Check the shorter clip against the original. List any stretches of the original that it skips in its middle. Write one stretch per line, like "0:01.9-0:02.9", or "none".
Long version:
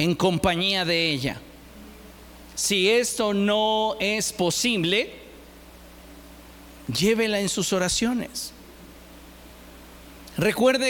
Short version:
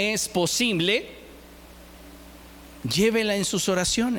none